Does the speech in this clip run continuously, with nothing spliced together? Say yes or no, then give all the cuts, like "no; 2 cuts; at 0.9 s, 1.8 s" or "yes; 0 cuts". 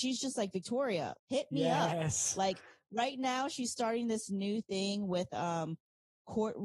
no; 1 cut; at 1.2 s